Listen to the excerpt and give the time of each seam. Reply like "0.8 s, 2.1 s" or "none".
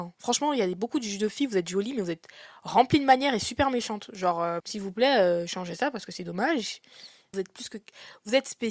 4.6 s, 7.3 s